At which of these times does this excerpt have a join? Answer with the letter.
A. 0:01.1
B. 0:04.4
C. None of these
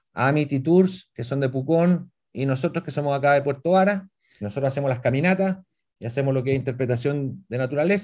B